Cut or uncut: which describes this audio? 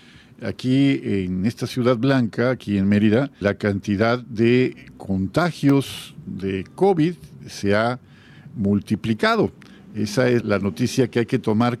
cut